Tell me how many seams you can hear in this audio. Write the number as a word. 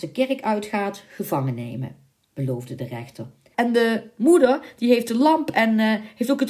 one